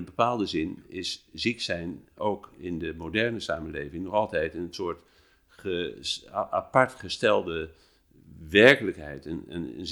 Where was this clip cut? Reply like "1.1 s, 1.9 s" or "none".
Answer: none